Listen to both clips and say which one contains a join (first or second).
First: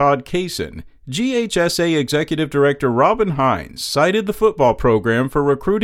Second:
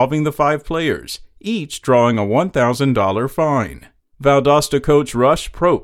second